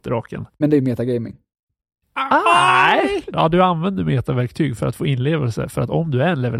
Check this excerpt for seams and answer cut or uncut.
uncut